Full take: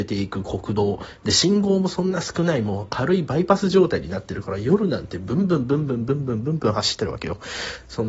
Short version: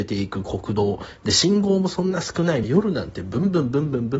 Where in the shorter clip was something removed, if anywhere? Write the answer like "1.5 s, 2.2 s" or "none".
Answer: 2.6 s